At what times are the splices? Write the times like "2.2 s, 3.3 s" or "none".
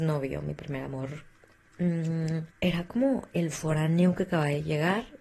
2.5 s